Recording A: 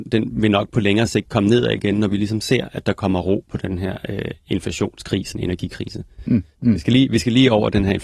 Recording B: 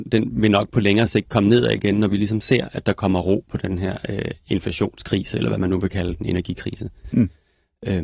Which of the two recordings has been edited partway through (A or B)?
A